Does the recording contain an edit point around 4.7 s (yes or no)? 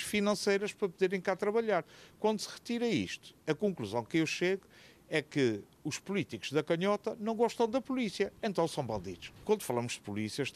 no